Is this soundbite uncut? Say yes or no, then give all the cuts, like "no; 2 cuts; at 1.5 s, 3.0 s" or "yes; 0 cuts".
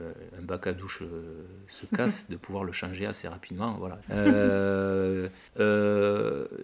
no; 2 cuts; at 4.0 s, 5.5 s